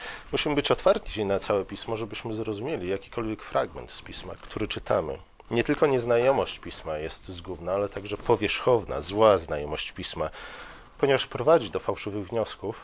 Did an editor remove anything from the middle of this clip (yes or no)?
yes